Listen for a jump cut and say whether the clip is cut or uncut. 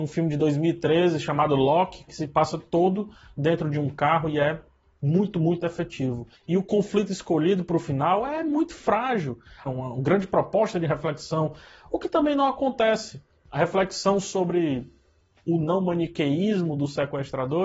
cut